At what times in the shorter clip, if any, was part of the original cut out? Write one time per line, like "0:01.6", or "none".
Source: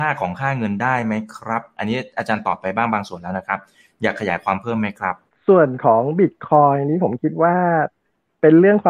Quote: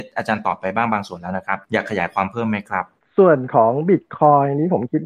0:01.6